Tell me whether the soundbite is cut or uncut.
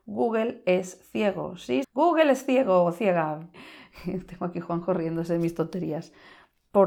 cut